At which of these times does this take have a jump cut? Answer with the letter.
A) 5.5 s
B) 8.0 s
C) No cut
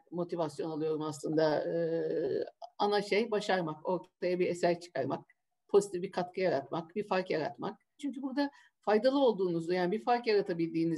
B